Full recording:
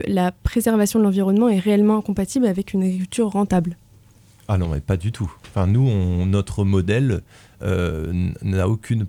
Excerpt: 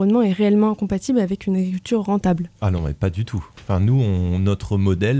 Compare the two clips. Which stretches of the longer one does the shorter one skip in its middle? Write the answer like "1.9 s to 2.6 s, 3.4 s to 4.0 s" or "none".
3.8 s to 4.4 s